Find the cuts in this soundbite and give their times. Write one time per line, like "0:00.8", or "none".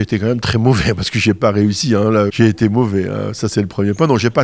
0:02.3

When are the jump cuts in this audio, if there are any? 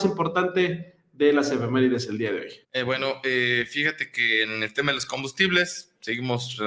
0:02.6

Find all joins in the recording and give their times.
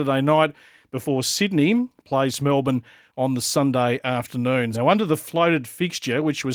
0:04.7

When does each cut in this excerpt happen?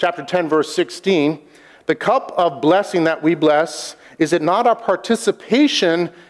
none

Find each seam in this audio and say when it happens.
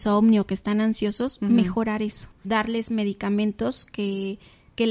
0:02.4

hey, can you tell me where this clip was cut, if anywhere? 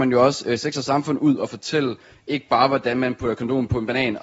none

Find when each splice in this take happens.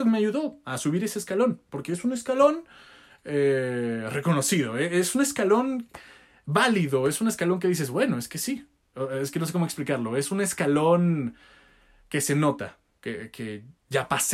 none

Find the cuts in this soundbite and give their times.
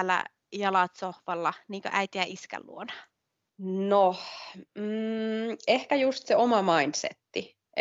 0:03.5

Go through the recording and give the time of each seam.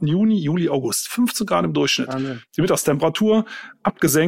none

